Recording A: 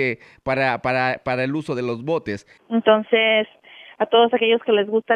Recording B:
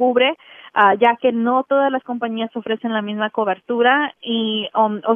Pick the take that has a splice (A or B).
A